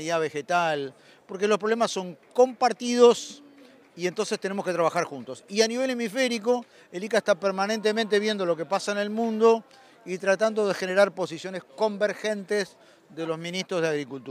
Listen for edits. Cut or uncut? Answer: uncut